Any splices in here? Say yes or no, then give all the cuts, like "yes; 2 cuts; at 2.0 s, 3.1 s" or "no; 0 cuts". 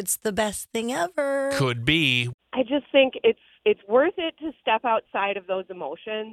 yes; 2 cuts; at 2.4 s, 3.6 s